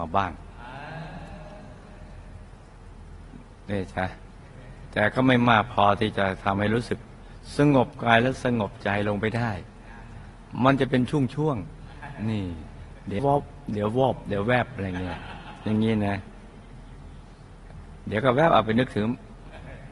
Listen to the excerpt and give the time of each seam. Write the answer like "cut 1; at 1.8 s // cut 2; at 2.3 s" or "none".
cut 1; at 13.2 s